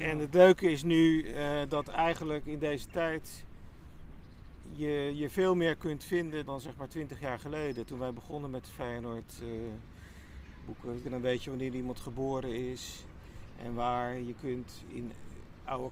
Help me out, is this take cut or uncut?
cut